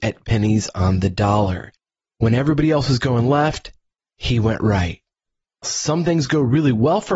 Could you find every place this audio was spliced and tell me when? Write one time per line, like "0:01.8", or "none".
0:05.6